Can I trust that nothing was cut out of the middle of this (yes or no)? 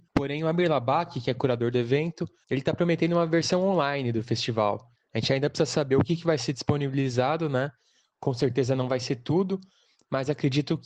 yes